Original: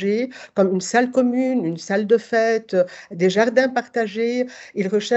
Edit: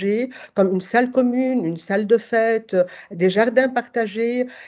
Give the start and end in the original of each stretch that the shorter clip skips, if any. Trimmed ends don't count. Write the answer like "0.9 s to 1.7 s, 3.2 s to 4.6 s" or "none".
none